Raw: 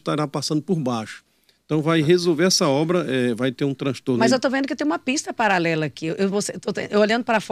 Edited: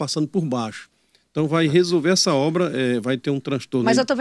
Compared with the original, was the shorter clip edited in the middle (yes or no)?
no